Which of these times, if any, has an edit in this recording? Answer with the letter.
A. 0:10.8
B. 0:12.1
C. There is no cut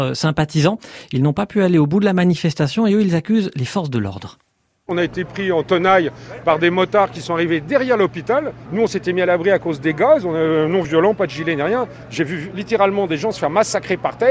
C